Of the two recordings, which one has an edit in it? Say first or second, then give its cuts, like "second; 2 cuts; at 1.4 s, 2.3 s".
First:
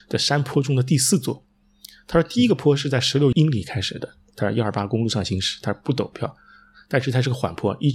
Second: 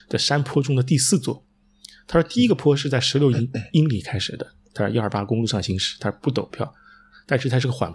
first; 1 cut; at 3.3 s